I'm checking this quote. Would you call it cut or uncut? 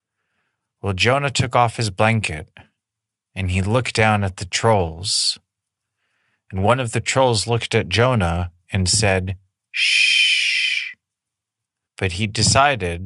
cut